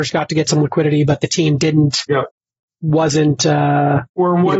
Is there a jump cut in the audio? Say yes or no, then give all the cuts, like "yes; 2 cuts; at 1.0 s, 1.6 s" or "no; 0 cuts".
no; 0 cuts